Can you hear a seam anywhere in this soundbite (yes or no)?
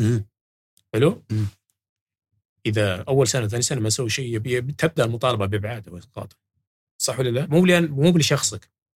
yes